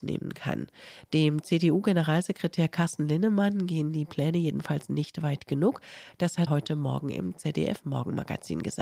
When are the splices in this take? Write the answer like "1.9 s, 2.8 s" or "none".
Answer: 6.5 s